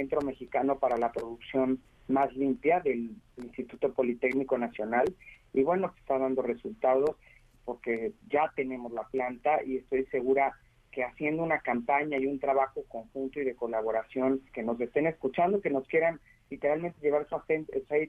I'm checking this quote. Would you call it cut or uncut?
cut